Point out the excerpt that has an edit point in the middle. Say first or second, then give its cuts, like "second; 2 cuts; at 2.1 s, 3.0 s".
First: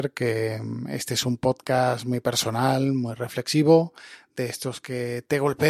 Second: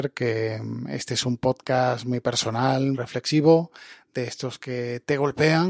second; 1 cut; at 2.9 s